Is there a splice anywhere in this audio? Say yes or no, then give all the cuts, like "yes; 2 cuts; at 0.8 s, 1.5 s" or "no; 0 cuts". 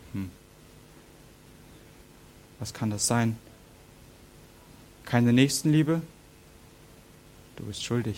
no; 0 cuts